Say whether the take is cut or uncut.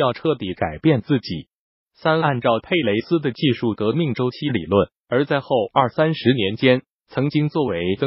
cut